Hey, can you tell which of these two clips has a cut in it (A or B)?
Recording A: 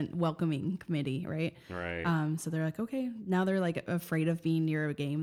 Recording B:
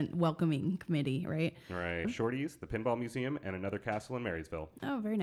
B